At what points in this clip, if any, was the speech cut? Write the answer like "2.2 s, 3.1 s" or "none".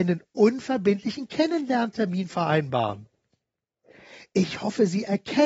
none